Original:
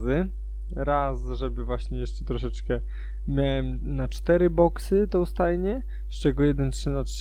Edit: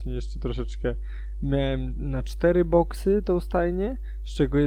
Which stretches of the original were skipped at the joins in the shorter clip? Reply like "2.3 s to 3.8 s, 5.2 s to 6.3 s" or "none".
none